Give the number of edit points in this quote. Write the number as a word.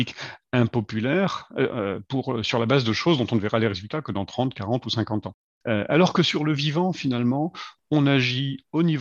zero